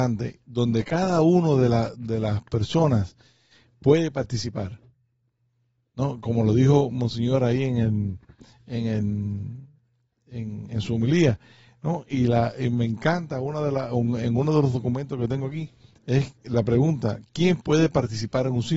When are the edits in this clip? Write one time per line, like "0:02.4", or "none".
none